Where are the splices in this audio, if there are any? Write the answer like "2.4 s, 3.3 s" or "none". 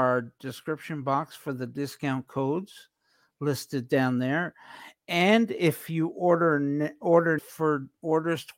7.4 s